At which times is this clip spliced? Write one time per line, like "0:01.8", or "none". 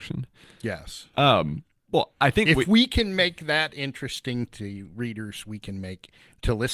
none

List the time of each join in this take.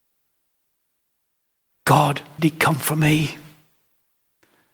0:02.4

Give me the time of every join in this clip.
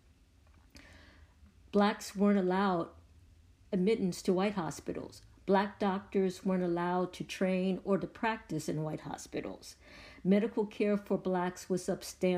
none

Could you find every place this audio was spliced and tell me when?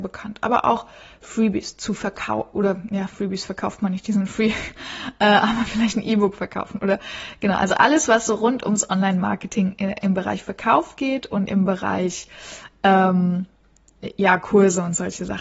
none

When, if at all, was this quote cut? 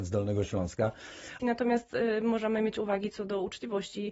0:01.4

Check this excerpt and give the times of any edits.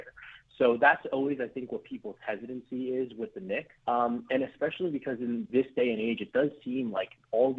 0:03.8
0:05.5

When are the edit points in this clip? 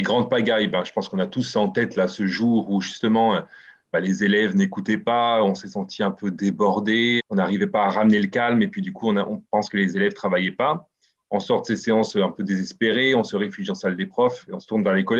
0:07.2

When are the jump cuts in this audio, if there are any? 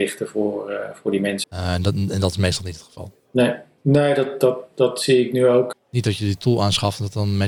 0:01.4
0:05.7

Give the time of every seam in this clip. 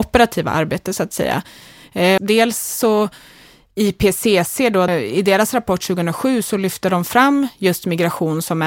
0:02.2
0:04.9

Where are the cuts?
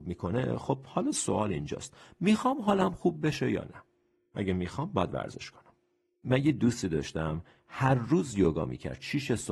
none

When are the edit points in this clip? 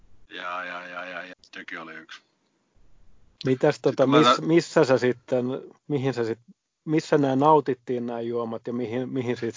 0:01.3
0:05.8

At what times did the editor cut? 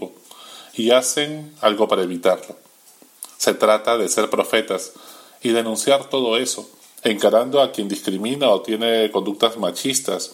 0:07.0

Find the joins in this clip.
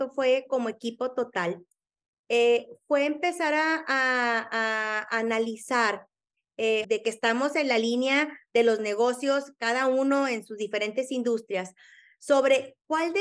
0:06.8

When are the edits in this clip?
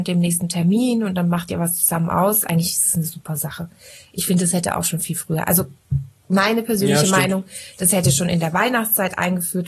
none

